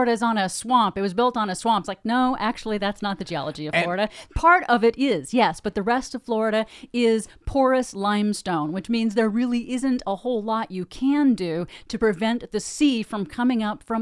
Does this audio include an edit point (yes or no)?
yes